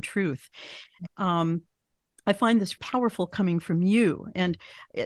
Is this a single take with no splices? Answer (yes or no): no